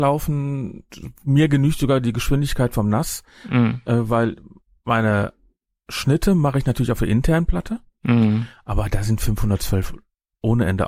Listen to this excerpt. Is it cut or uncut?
uncut